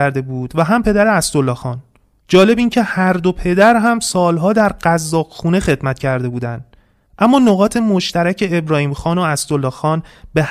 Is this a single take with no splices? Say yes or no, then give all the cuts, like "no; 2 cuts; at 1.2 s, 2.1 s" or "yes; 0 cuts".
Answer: yes; 0 cuts